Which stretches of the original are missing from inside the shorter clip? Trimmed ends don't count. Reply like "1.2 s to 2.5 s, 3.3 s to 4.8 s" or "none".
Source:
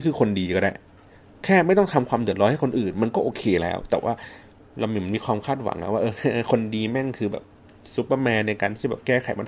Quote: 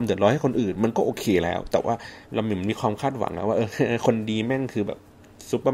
4.4 s to 4.7 s